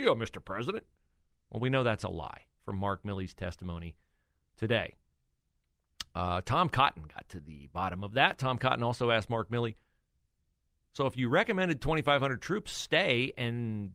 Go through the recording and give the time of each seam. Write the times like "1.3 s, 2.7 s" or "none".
none